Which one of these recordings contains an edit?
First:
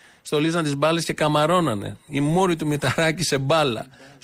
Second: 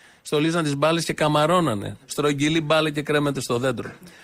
second; 1 cut; at 2.0 s

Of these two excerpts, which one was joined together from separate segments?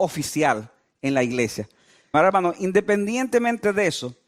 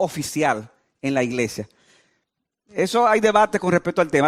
first; 1 cut; at 2.1 s

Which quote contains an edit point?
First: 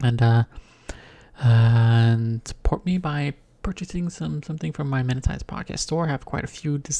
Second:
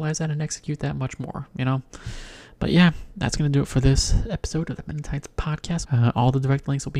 second; 1 cut; at 5.8 s

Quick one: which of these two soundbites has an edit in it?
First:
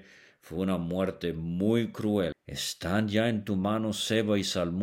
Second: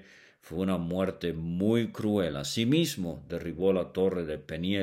first; 1 cut; at 2.3 s

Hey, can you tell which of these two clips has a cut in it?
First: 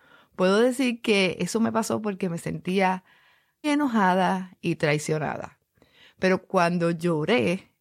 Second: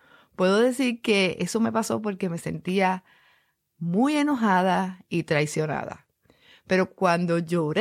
first; 1 cut; at 3.6 s

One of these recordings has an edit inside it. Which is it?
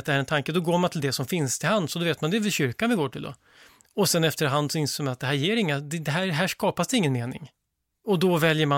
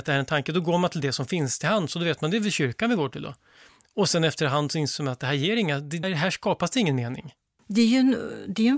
second; 2 cuts; at 6.0 s, 7.6 s

